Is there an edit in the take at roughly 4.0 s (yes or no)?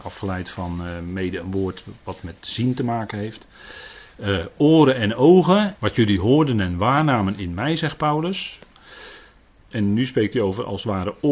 no